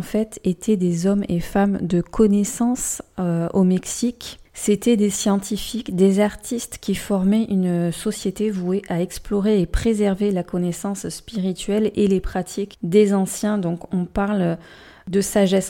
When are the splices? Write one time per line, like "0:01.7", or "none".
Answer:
0:13.9

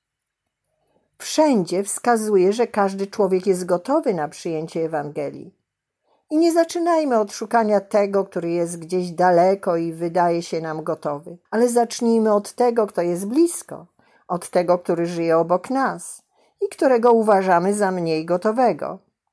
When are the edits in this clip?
0:11.4

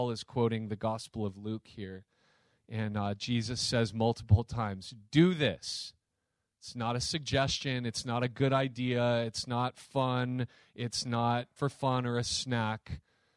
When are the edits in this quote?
0:11.6

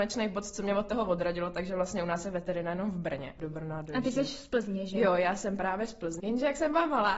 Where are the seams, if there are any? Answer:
0:03.4
0:06.2

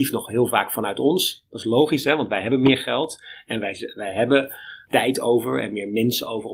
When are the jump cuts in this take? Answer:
none

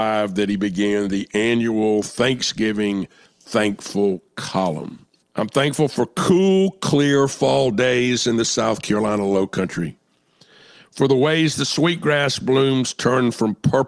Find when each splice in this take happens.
0:05.2

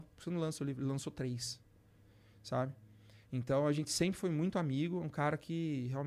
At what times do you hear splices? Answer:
none

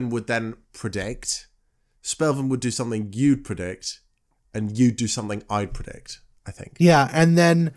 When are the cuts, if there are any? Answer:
none

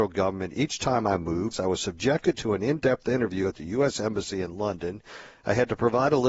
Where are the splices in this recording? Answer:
0:01.5

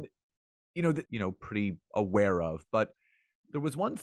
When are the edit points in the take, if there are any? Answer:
0:01.0

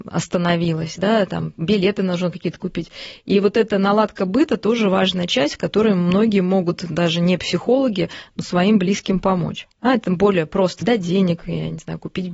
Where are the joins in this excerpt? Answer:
0:09.7
0:10.8

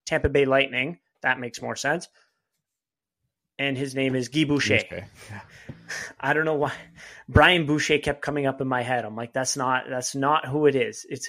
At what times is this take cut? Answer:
none

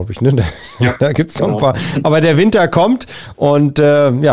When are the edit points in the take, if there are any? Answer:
none

